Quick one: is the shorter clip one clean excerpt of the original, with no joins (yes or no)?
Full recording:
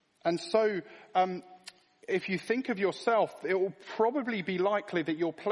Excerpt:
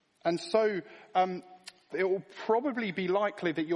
no